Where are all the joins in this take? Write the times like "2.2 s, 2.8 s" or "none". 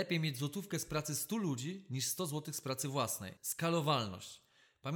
3.4 s